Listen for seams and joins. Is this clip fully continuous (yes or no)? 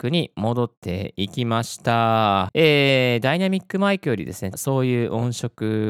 no